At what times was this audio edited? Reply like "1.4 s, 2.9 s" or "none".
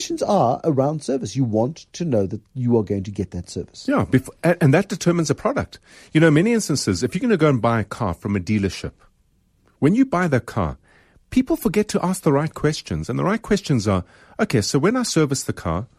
none